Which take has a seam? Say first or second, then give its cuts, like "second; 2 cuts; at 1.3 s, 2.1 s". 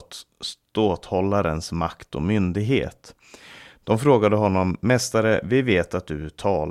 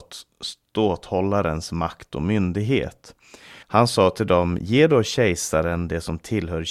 second; 1 cut; at 3.6 s